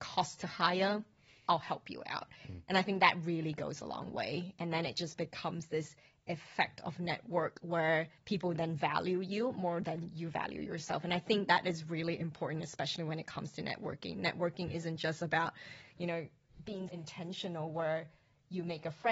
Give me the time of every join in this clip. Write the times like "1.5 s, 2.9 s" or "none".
8.2 s, 16.9 s